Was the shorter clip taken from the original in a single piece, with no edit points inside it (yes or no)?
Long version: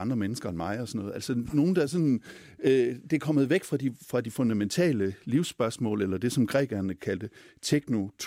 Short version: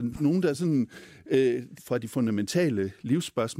no